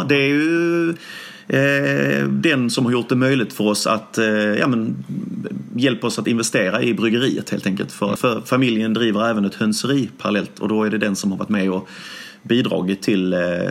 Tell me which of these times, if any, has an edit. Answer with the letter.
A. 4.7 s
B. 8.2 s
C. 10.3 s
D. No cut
B